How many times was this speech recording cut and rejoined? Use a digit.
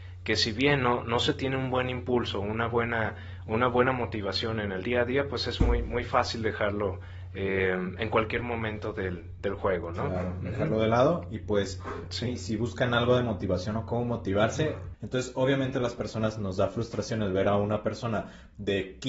1